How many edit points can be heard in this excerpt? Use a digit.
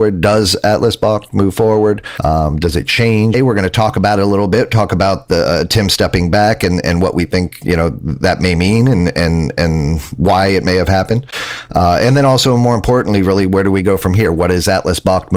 1